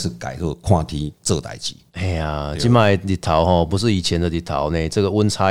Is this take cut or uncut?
uncut